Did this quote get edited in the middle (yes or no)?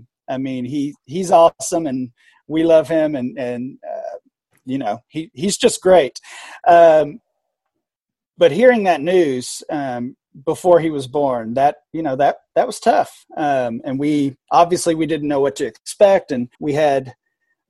yes